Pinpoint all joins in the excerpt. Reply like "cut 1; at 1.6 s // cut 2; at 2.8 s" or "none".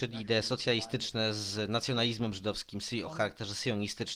cut 1; at 3.1 s